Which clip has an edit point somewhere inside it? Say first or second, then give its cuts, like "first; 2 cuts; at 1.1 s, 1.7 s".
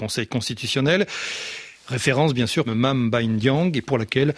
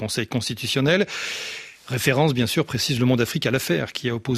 first; 1 cut; at 2.7 s